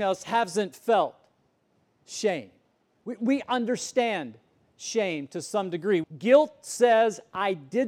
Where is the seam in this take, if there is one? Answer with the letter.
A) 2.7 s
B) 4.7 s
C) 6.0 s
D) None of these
C